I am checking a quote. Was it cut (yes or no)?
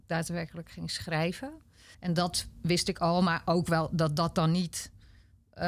yes